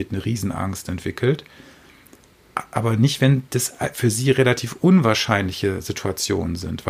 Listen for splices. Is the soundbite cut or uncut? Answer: uncut